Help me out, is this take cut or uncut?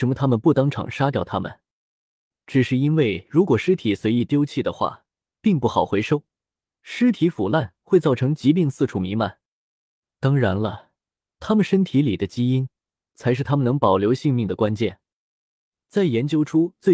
uncut